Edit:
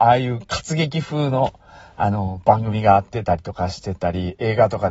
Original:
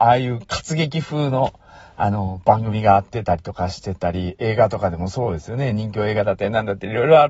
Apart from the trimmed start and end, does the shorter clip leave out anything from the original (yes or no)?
no